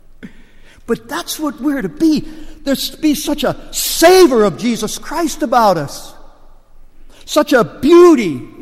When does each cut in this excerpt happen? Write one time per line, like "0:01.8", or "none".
none